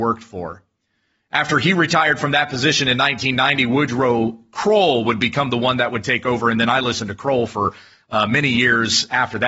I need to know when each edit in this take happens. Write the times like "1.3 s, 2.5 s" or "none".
none